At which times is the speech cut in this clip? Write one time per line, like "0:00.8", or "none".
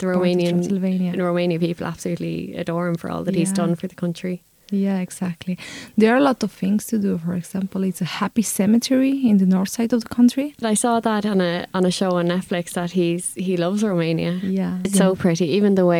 0:10.6
0:14.8